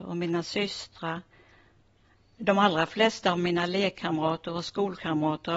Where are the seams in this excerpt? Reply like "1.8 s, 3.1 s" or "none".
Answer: none